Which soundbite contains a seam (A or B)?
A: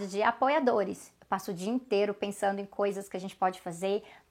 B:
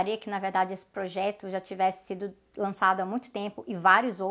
A